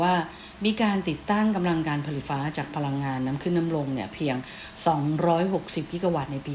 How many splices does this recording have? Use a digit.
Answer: 1